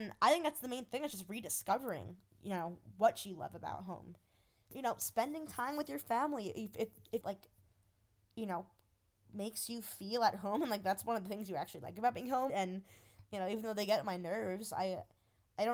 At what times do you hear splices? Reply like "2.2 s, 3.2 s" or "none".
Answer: 7.2 s, 12.5 s